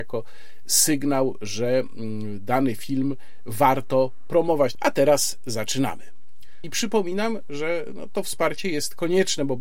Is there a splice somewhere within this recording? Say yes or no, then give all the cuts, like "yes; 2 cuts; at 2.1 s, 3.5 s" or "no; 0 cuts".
yes; 2 cuts; at 4.7 s, 6.6 s